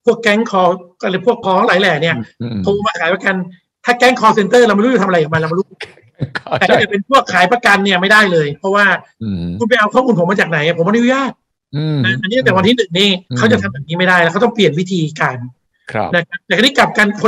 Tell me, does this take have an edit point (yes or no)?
yes